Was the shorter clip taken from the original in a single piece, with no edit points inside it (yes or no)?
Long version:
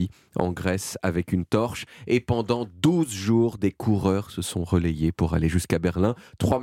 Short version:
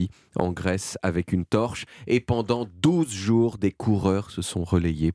yes